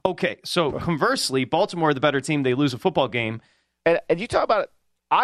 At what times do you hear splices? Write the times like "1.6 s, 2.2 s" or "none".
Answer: 3.8 s